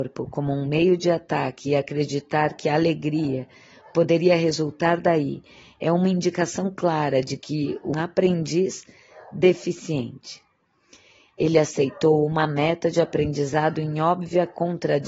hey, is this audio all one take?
no; 1 cut; at 7.9 s

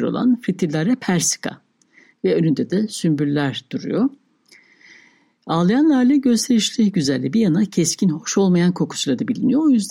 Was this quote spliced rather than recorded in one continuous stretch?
no; 0 cuts

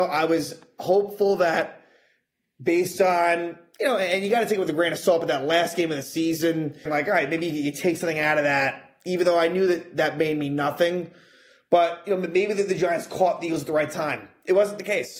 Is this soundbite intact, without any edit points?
no; 1 cut; at 6.9 s

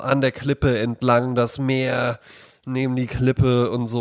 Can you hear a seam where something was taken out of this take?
no; 0 cuts

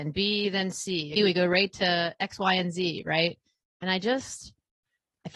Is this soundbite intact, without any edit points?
no; 1 cut; at 1.2 s

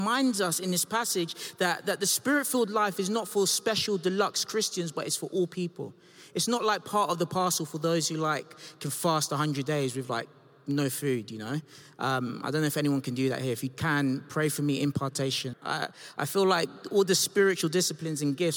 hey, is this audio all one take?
no; 1 cut; at 15.5 s

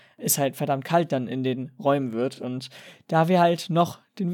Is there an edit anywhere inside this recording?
no; 0 cuts

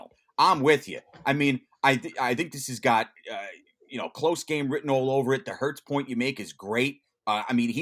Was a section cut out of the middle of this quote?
no; 0 cuts

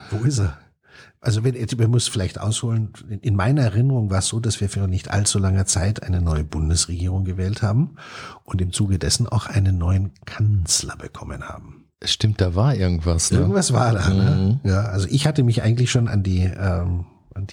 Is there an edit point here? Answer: no; 0 cuts

